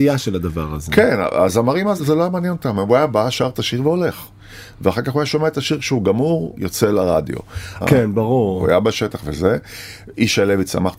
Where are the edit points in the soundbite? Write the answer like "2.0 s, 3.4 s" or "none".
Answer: 7.8 s